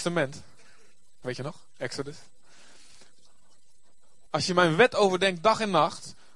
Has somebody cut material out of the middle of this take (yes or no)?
yes